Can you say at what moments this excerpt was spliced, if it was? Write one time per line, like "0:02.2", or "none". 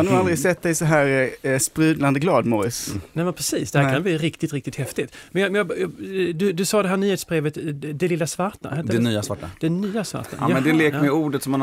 none